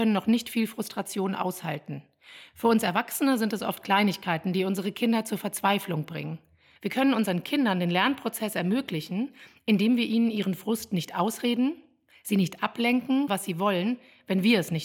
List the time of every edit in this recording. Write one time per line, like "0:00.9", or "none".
0:06.8
0:13.3